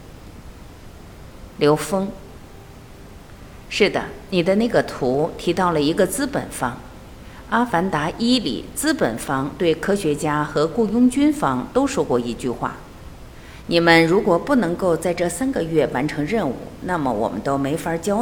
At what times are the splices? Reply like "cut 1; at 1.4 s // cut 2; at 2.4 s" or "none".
none